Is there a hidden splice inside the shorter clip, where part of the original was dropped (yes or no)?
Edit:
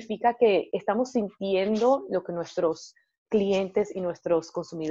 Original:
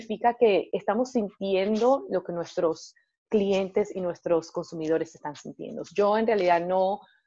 no